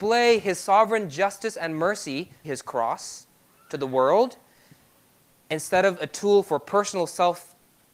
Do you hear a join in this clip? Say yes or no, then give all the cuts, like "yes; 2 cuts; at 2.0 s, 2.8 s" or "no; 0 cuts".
yes; 1 cut; at 2.4 s